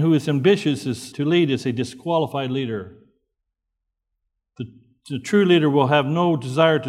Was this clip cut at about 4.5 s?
no; 1 cut; at 1.1 s

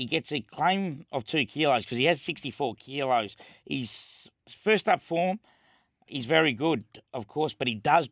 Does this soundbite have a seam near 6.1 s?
yes; 1 cut; at 6.1 s

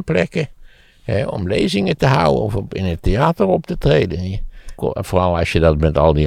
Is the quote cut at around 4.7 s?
yes; 1 cut; at 4.7 s

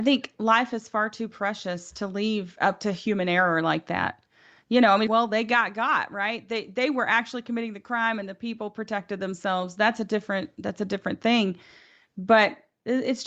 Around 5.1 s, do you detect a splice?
yes; 1 cut; at 5.1 s

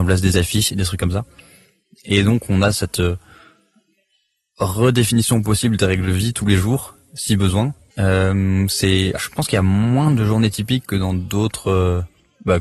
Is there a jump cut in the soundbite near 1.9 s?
no; 2 cuts; at 7.9 s, 9.2 s

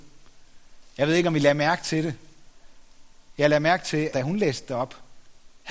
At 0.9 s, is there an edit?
no; 1 cut; at 4.1 s

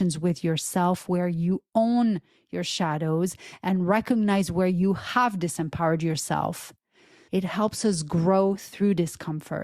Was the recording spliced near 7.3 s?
yes; 1 cut; at 7.3 s

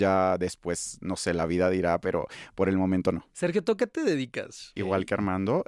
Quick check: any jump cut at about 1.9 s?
no; 1 cut; at 4.8 s

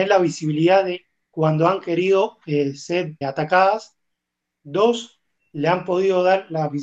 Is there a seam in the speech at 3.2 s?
yes; 1 cut; at 3.2 s

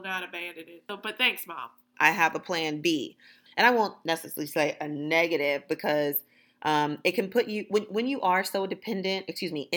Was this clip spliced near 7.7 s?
no; 2 cuts; at 1.9 s, 3.5 s

